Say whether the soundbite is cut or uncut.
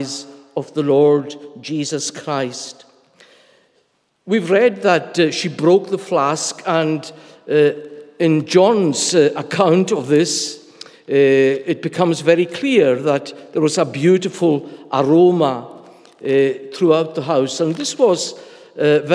uncut